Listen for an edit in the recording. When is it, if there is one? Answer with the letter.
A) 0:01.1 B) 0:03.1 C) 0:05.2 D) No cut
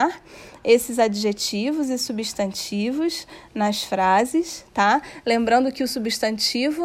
D